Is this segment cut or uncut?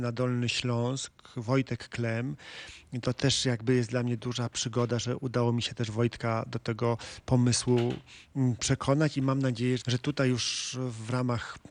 cut